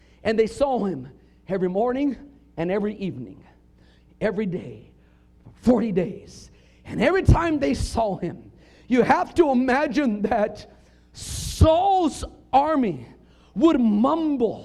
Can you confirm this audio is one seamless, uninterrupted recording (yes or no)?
yes